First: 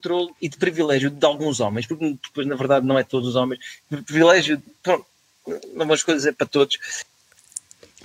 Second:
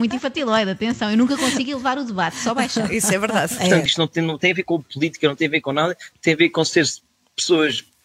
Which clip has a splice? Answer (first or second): second